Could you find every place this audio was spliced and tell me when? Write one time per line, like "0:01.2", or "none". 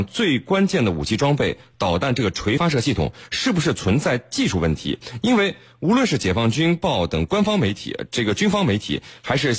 0:02.6